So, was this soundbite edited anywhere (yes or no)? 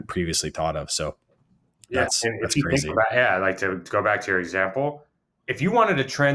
yes